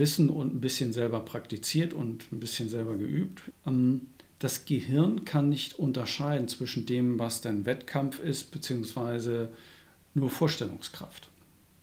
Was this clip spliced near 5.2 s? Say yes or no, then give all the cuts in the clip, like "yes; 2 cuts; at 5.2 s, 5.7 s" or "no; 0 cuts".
no; 2 cuts; at 3.5 s, 7.2 s